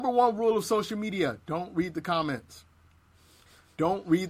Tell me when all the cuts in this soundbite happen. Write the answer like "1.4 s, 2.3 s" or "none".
none